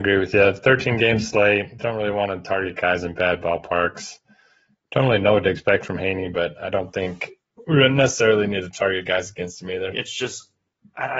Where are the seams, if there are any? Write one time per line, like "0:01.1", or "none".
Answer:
0:09.9

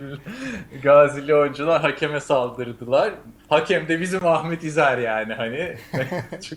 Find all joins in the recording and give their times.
0:03.4

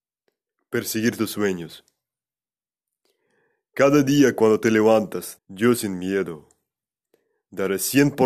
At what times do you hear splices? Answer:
0:05.4

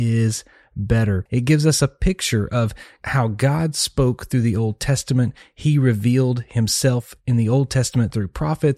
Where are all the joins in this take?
none

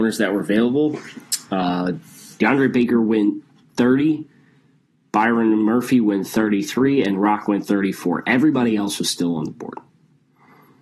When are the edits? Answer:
none

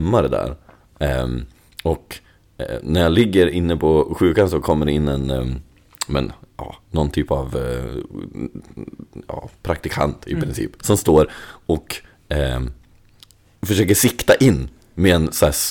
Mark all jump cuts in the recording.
0:10.8

